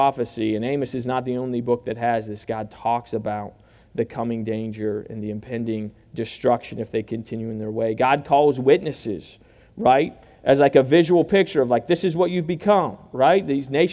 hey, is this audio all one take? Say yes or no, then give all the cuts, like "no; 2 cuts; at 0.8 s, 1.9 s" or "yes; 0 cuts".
yes; 0 cuts